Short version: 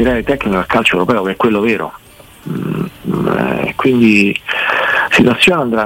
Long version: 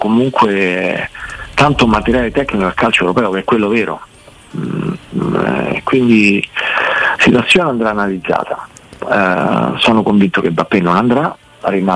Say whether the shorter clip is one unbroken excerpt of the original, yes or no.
yes